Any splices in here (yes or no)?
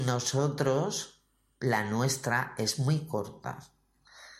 no